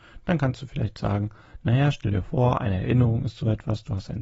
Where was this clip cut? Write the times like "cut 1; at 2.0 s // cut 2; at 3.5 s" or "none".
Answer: none